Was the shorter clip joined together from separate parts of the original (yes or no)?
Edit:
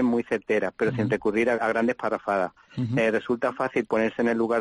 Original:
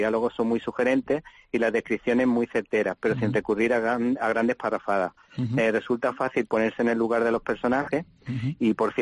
yes